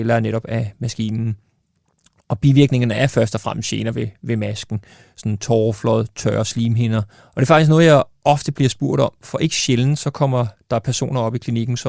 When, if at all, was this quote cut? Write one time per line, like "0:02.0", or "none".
0:07.2